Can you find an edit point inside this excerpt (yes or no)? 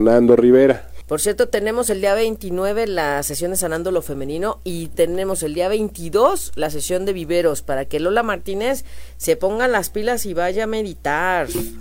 yes